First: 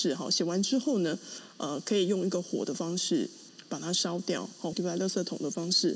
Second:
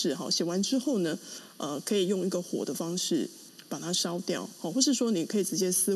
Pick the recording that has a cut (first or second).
first